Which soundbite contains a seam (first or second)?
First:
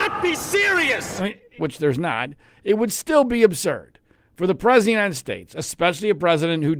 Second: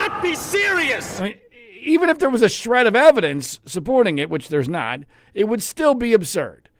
first